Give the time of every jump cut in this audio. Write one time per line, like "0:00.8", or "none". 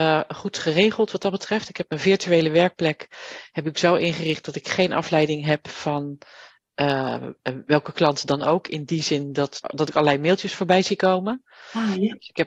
0:09.6